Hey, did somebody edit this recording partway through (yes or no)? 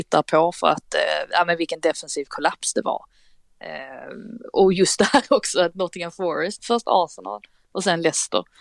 yes